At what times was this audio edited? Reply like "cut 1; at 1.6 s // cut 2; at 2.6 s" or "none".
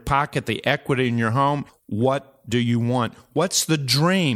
cut 1; at 1.7 s